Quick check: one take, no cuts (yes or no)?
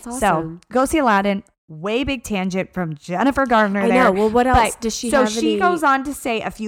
yes